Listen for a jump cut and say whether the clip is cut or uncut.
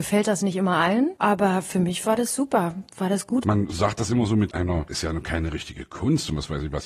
cut